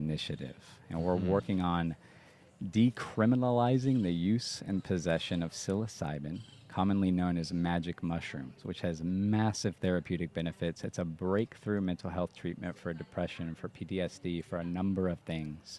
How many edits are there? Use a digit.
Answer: 0